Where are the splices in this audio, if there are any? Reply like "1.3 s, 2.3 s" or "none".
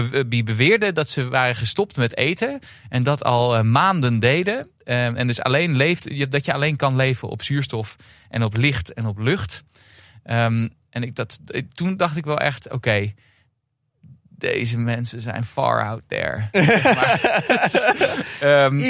none